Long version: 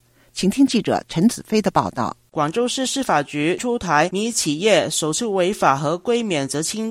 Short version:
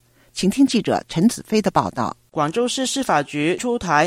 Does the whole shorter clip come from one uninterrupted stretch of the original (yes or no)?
yes